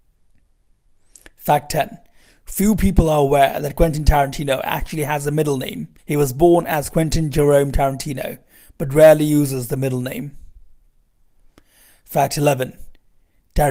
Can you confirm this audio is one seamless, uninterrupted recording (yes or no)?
no